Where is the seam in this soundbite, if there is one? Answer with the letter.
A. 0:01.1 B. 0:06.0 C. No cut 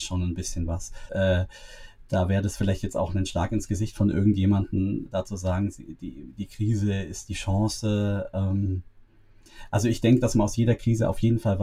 A